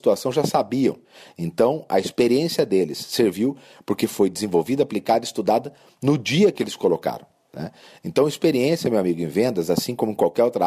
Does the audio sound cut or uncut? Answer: uncut